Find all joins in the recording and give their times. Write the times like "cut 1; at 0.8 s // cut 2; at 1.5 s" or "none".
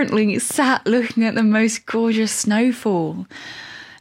none